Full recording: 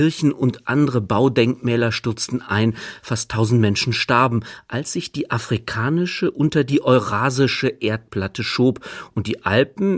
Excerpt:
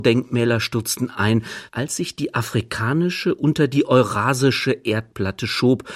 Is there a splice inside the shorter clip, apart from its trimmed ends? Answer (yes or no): yes